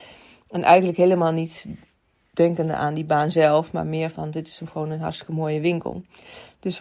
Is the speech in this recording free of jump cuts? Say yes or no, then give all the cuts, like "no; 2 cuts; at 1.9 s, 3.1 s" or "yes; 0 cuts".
yes; 0 cuts